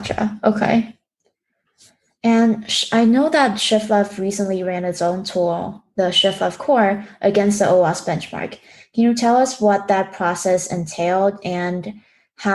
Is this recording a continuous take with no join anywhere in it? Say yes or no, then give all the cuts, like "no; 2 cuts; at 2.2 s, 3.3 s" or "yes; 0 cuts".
yes; 0 cuts